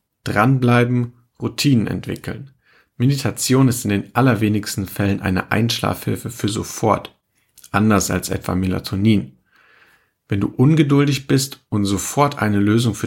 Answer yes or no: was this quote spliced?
no